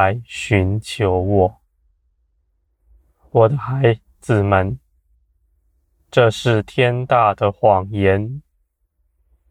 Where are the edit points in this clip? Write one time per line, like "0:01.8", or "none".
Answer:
none

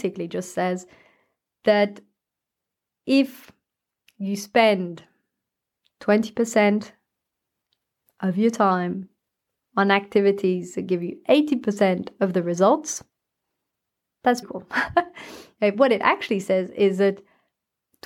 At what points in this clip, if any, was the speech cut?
0:14.4

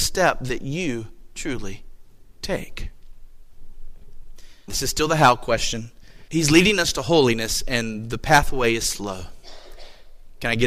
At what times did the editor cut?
0:04.7
0:06.3

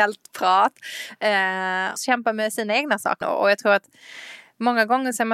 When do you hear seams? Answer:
0:02.0
0:03.2

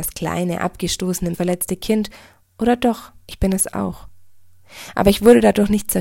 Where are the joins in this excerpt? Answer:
0:01.3
0:03.2

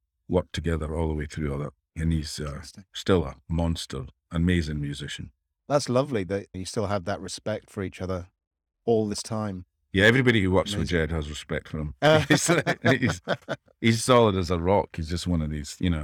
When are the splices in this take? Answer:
0:14.0

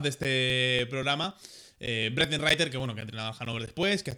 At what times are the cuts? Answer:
none

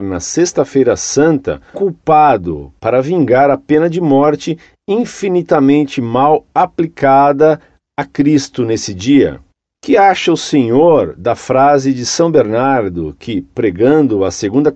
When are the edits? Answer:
0:01.7

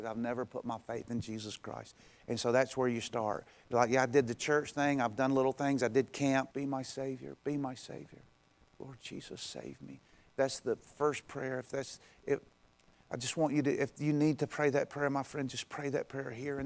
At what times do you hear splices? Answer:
0:06.5

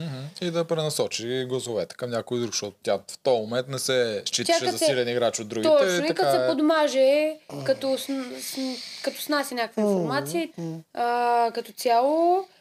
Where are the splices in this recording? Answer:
0:10.5

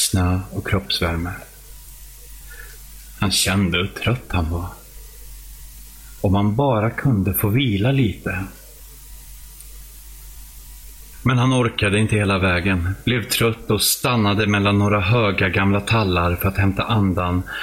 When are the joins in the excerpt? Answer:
0:11.1

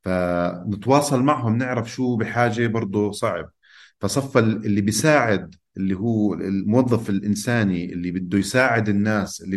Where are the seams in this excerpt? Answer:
none

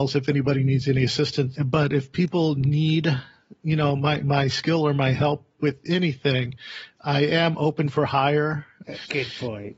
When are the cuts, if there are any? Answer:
0:01.5
0:08.8

